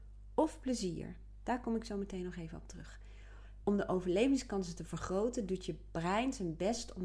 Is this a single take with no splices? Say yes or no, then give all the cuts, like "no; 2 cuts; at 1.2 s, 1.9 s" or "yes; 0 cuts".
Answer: yes; 0 cuts